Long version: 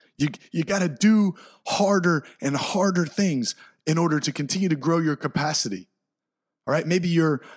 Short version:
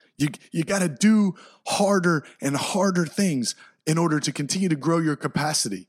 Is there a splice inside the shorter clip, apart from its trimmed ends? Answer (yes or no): no